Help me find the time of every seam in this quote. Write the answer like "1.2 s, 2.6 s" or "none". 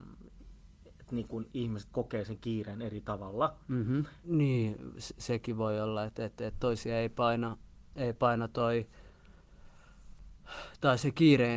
4.2 s